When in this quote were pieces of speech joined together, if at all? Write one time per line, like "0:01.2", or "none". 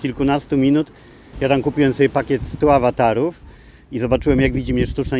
0:01.3